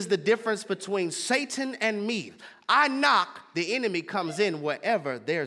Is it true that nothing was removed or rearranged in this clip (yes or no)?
yes